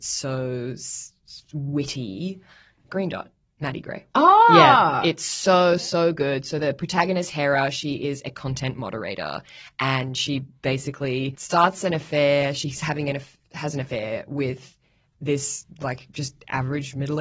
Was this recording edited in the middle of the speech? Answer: no; 0 cuts

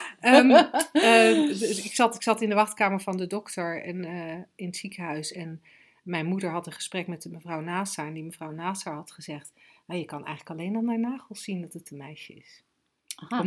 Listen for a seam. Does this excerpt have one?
no; 0 cuts

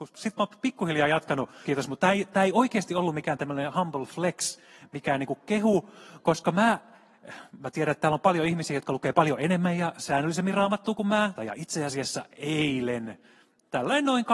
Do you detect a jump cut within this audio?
yes; 2 cuts; at 1.6 s, 11.4 s

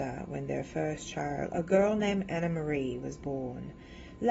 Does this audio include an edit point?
no; 0 cuts

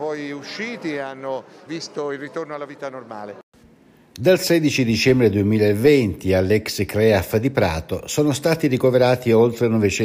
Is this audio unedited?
no; 1 cut; at 1.7 s

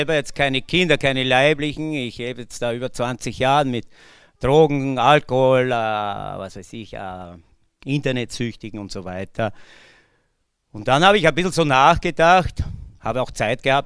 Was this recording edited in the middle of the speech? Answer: no; 0 cuts

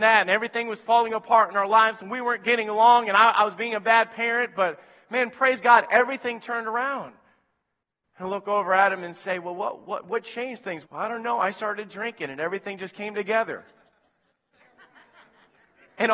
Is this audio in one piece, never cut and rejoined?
no; 1 cut; at 10.8 s

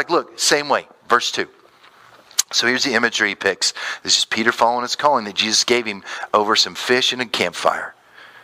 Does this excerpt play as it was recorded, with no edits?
yes; 0 cuts

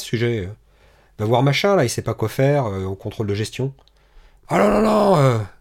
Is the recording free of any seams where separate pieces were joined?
no; 1 cut; at 4.4 s

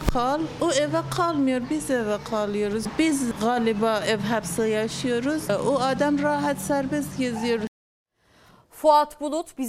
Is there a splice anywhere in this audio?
no; 0 cuts

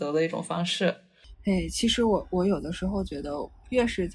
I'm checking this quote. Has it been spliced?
no; 0 cuts

